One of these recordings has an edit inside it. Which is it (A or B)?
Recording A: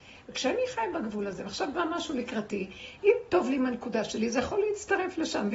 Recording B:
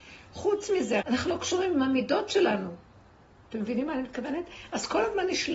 B